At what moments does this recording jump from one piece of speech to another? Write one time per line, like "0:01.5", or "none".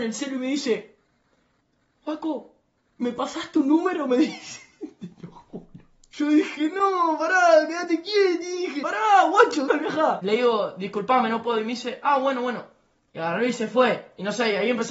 0:02.9
0:09.7